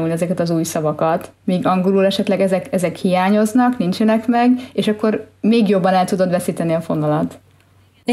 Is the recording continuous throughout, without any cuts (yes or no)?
yes